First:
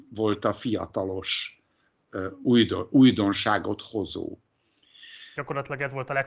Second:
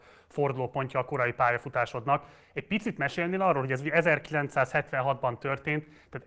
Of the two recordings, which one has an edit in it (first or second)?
first